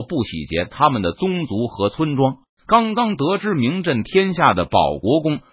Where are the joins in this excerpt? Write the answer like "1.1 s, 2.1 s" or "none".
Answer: 2.6 s